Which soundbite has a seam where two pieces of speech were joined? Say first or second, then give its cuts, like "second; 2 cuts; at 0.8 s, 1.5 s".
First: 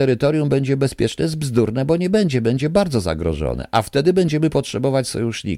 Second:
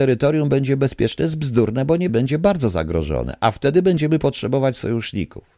second; 1 cut; at 2.1 s